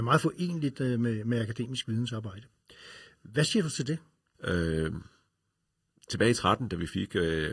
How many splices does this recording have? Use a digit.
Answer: 1